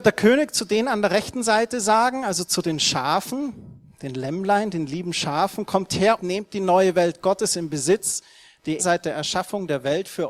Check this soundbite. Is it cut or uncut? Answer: cut